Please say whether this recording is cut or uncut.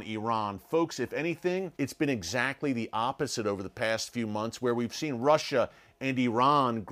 cut